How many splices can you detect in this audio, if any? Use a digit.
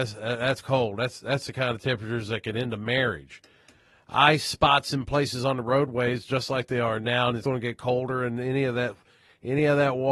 1